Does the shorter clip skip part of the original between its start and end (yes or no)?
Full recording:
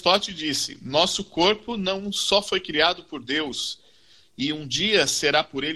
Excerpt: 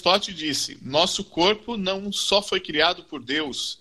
no